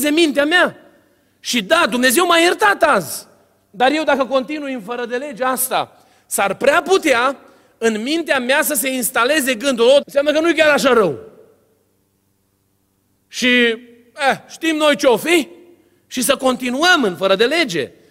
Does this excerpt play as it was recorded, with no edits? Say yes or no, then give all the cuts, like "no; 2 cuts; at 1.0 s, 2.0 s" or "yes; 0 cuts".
no; 1 cut; at 10.0 s